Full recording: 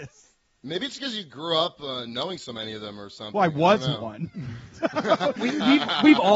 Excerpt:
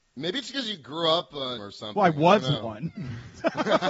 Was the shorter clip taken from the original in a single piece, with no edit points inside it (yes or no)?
no